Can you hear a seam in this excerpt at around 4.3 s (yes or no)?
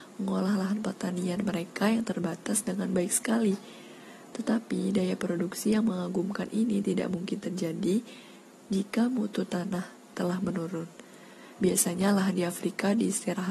no